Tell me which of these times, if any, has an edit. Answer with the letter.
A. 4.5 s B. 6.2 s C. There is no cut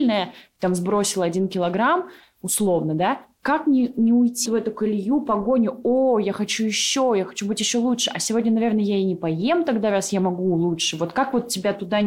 A